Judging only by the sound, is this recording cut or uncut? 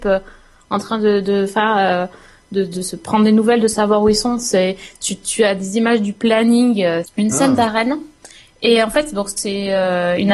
cut